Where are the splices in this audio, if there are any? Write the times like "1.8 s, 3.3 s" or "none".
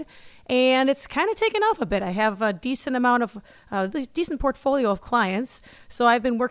none

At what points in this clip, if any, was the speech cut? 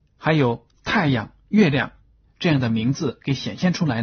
2.2 s

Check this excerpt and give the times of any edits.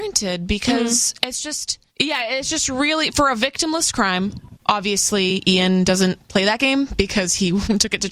1.9 s, 4.6 s

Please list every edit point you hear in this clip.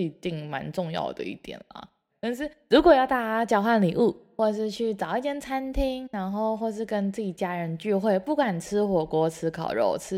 2.1 s

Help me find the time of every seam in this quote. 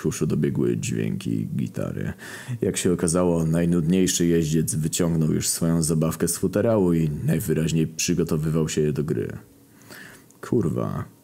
none

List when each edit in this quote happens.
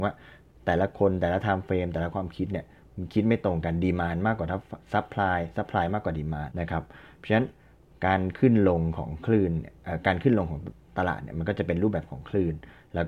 6.5 s

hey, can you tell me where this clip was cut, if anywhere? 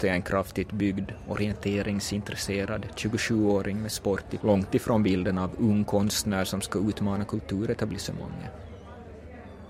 4.4 s

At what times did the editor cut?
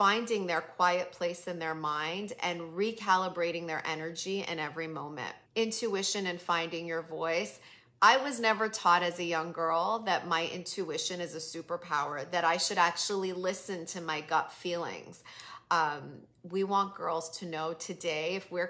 5.4 s

